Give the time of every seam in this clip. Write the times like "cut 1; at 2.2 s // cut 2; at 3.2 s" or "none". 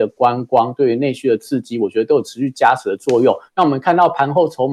cut 1; at 3.5 s